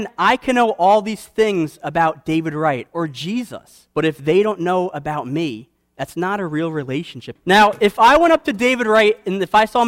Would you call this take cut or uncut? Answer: cut